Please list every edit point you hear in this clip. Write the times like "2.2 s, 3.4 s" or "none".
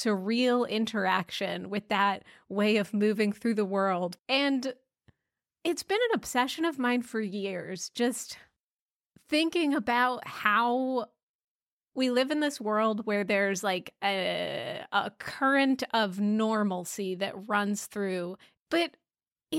4.2 s, 18.6 s